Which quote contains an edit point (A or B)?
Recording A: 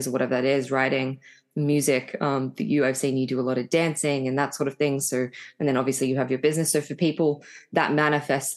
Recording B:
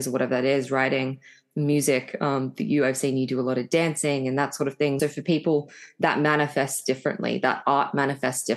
B